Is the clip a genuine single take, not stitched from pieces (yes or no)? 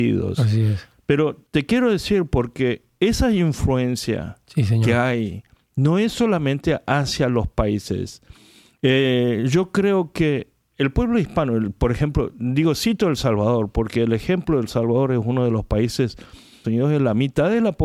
no